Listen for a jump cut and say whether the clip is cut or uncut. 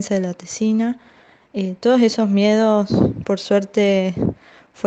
uncut